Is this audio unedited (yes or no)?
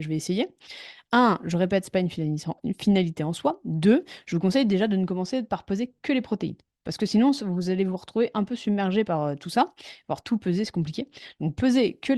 yes